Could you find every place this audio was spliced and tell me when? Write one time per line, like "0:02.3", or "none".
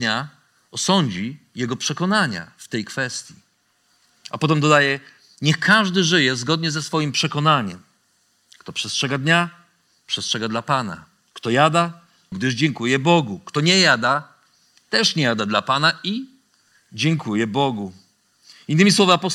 0:12.3